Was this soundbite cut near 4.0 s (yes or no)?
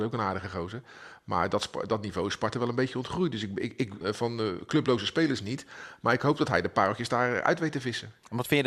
yes